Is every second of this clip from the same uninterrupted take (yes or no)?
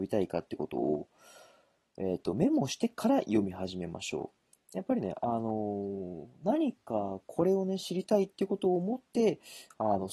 yes